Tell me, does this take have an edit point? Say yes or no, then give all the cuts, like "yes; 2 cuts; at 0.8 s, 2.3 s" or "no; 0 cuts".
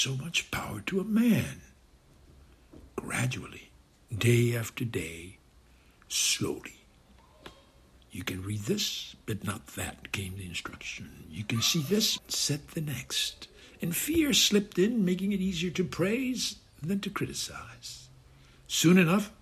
yes; 1 cut; at 12.2 s